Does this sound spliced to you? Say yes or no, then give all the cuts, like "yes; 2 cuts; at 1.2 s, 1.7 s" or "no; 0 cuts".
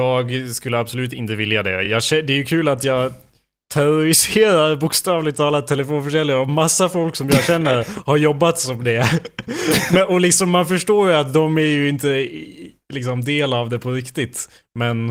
no; 0 cuts